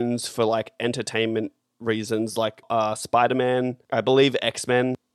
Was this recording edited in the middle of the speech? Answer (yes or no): no